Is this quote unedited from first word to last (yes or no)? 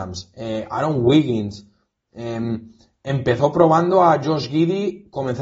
yes